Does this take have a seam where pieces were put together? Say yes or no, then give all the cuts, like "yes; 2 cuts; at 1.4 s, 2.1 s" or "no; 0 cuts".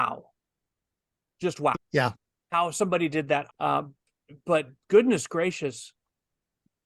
yes; 2 cuts; at 1.7 s, 3.5 s